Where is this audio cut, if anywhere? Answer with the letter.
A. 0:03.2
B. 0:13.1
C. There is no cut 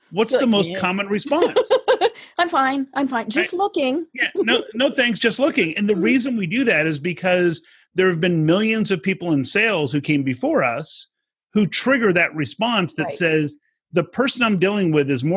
C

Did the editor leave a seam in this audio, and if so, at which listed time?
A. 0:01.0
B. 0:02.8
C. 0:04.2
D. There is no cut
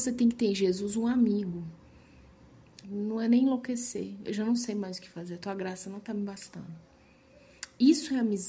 B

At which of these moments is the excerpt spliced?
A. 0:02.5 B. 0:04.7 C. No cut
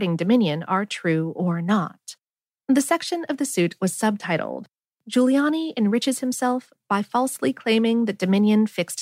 A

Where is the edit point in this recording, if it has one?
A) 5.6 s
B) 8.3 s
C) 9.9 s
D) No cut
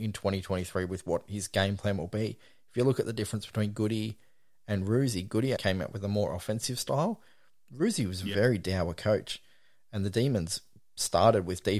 A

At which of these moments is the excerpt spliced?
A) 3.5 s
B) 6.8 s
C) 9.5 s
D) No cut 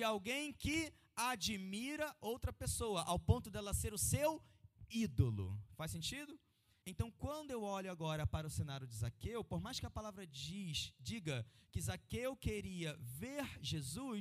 B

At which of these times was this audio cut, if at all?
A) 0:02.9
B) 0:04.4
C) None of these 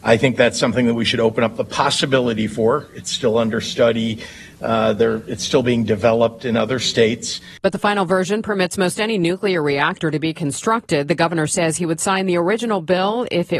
C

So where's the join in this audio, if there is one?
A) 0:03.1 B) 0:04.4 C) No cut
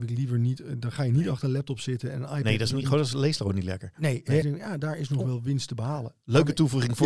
B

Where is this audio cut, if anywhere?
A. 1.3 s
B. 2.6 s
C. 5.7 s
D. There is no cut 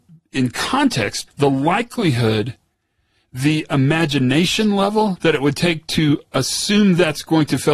A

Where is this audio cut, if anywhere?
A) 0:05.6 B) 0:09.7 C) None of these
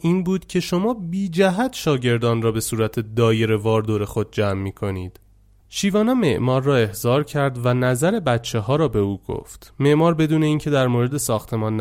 A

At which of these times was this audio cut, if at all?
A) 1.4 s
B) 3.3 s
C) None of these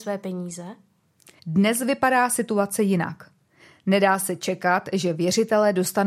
A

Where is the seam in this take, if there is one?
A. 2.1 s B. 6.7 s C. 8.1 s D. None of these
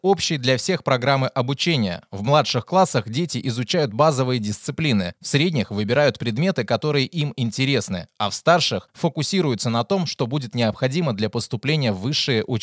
D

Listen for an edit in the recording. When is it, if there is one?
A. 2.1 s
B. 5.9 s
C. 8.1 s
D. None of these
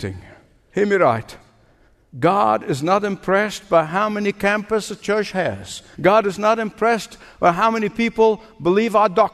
B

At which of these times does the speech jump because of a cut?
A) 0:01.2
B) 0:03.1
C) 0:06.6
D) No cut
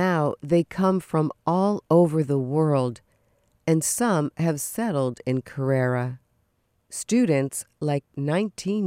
D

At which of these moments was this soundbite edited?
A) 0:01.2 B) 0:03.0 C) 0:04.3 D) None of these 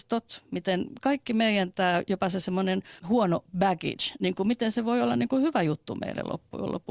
B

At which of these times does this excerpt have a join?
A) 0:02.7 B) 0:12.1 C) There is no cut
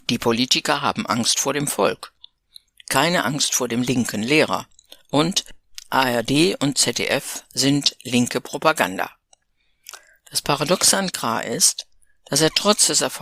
C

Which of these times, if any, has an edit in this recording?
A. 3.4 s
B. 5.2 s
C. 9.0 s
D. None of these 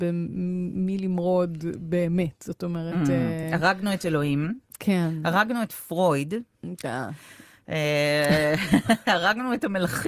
D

